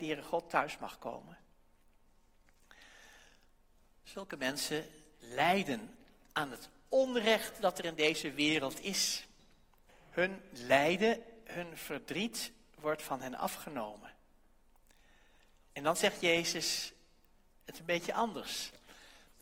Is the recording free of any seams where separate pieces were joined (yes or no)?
no